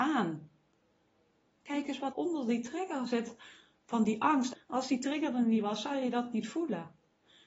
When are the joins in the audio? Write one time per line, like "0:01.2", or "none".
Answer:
0:02.1
0:04.5